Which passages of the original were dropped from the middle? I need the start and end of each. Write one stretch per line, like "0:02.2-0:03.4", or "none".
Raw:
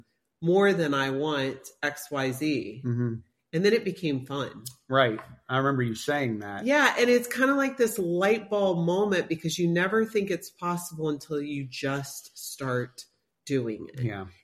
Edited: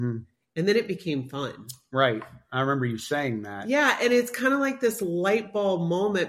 none